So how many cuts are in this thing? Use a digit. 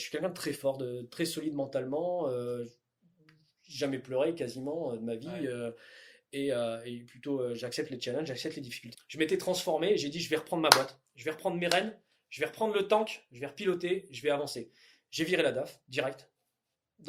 1